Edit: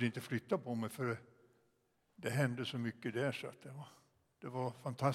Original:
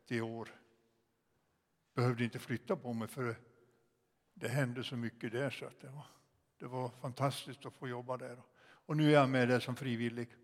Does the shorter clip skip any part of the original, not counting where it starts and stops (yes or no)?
no